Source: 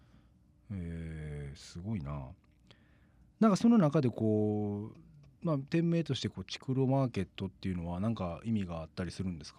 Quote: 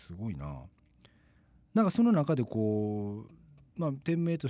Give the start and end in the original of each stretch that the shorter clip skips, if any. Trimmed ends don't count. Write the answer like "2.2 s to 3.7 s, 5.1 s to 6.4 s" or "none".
none